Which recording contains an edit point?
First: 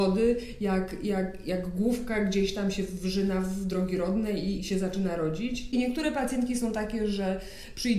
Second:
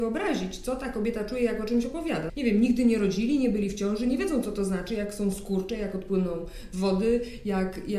second; 1 cut; at 2.3 s

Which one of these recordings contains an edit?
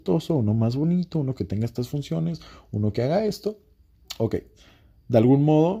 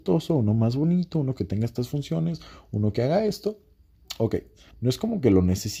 second; 1 cut; at 4.7 s

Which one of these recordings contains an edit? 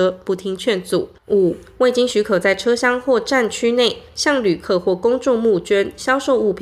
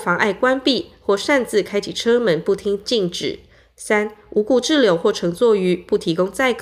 first; 1 cut; at 1.2 s

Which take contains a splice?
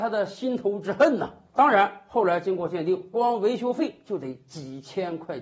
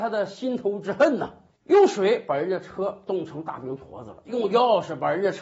second; 1 cut; at 1.5 s

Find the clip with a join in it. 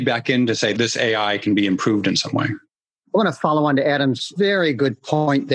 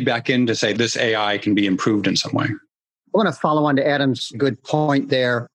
second; 1 cut; at 4.3 s

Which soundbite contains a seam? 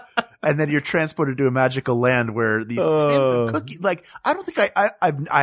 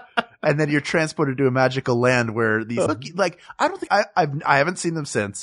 second; 2 cuts; at 2.9 s, 3.9 s

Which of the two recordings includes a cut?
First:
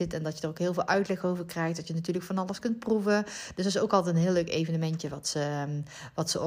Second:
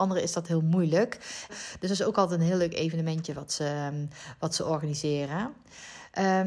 second; 1 cut; at 1.5 s

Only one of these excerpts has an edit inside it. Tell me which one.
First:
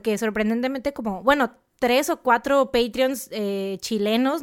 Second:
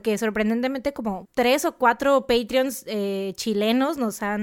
second; 1 cut; at 1.2 s

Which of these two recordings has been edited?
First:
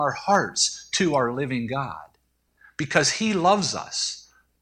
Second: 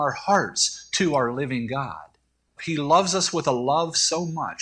second; 1 cut; at 2.6 s

